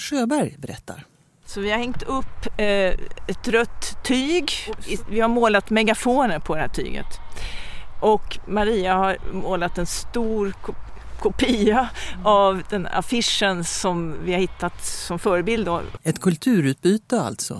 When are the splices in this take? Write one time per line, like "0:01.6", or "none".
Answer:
0:16.0